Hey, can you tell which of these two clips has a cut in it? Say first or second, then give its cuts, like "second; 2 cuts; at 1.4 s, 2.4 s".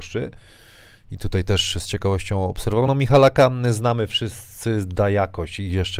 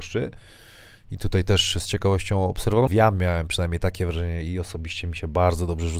second; 1 cut; at 2.9 s